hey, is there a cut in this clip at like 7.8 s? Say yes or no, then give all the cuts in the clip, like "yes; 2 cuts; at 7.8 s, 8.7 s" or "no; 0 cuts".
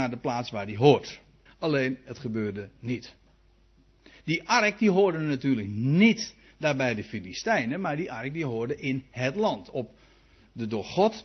no; 1 cut; at 1.5 s